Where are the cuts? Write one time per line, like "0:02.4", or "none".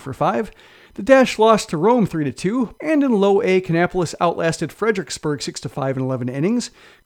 0:02.8